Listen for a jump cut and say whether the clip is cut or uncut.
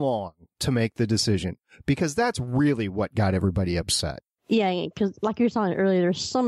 uncut